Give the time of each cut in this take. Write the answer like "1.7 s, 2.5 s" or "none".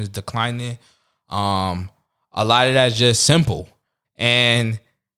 4.0 s